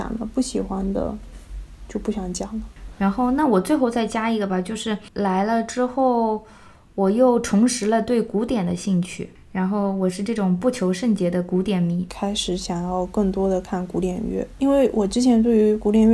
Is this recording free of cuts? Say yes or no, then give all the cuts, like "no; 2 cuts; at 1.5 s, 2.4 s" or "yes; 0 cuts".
no; 1 cut; at 12.1 s